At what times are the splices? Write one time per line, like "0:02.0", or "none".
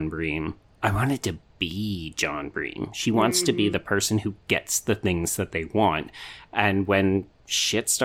none